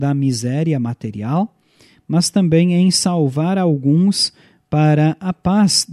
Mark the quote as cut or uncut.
uncut